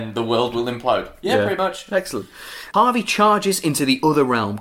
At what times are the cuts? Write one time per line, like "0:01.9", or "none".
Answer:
none